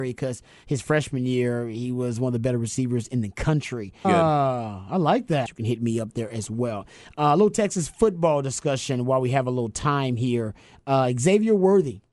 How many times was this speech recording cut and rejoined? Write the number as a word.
two